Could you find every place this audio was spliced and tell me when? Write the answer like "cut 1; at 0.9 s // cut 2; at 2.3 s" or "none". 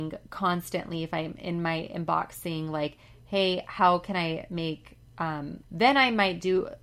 cut 1; at 5.6 s

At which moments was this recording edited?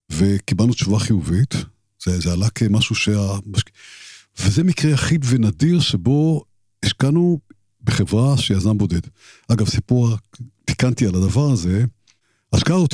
none

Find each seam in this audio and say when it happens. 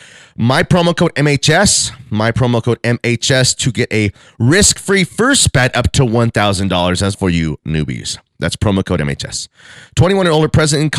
cut 1; at 7.1 s

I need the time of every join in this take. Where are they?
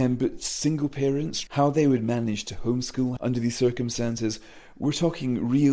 cut 1; at 1.5 s // cut 2; at 3.2 s

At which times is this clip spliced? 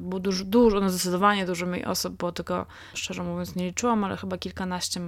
cut 1; at 2.9 s

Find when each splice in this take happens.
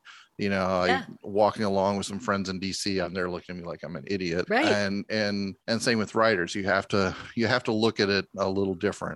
cut 1; at 3.0 s // cut 2; at 4.5 s // cut 3; at 5.6 s

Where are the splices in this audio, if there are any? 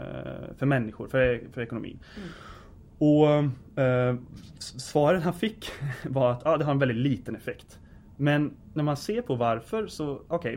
none

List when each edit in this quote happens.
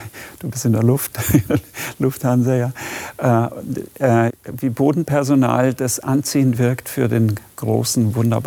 cut 1; at 4.3 s

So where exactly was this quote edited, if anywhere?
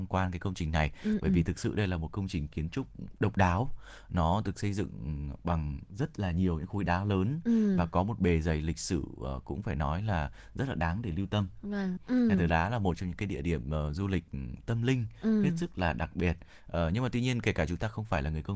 cut 1; at 12.0 s

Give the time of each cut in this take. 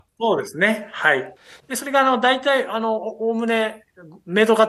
cut 1; at 1.6 s

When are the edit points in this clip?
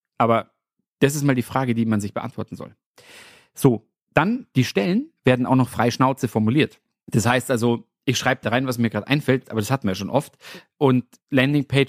cut 1; at 8.4 s // cut 2; at 9.4 s // cut 3; at 10.8 s

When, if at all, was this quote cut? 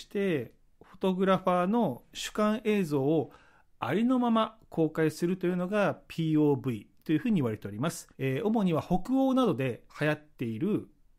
cut 1; at 8.1 s // cut 2; at 9.9 s

